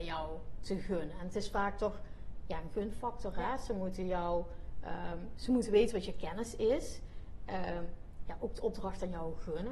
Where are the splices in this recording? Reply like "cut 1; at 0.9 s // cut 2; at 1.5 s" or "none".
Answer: cut 1; at 8.3 s

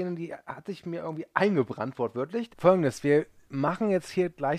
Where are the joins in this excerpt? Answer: cut 1; at 2.5 s

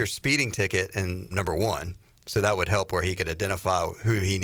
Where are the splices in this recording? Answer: cut 1; at 1.3 s

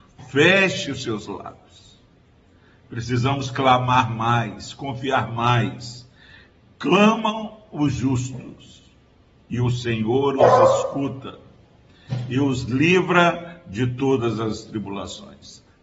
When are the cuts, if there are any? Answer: none

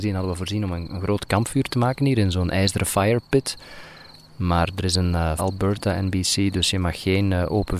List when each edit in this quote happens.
cut 1; at 5.4 s

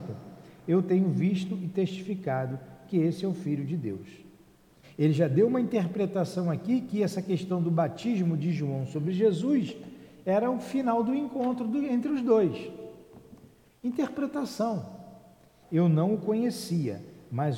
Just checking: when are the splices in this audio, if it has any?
cut 1; at 4.8 s // cut 2; at 15.6 s

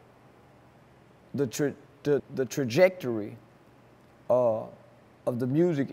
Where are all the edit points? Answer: cut 1; at 2.2 s

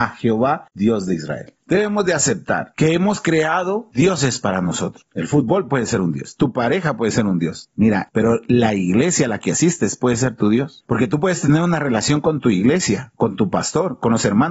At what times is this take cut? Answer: cut 1; at 8.1 s

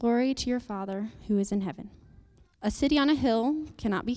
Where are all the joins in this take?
cut 1; at 2.5 s

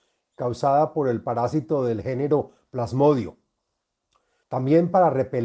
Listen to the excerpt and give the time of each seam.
cut 1; at 4.4 s

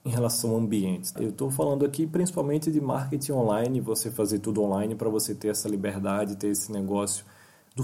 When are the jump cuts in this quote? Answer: none

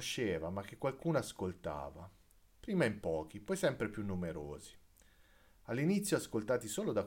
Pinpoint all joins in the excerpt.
none

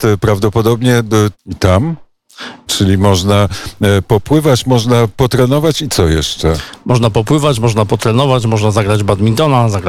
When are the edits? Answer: cut 1; at 1.3 s // cut 2; at 2.7 s

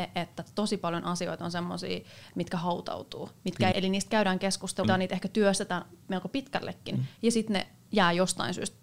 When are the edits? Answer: cut 1; at 3.7 s // cut 2; at 4.8 s

